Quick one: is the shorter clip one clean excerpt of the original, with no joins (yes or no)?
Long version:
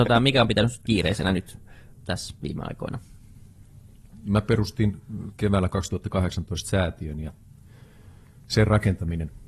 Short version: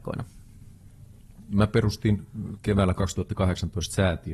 yes